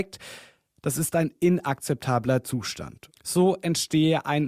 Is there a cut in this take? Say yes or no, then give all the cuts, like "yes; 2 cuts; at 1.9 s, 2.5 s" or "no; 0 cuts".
yes; 1 cut; at 3.1 s